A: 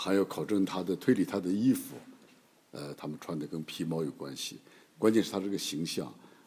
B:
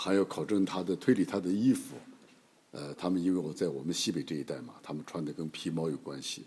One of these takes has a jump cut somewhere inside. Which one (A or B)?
A